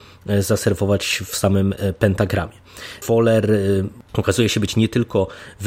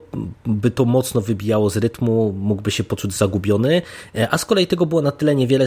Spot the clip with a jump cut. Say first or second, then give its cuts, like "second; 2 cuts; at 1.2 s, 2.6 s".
first; 1 cut; at 3.0 s